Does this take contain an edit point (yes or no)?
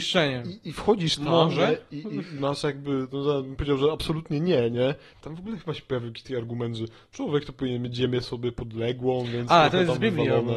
yes